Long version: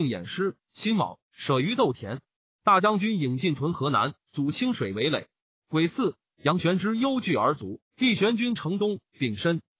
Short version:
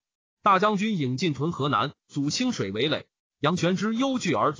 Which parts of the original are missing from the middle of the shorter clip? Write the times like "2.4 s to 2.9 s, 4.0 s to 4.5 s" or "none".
5.5 s to 6.3 s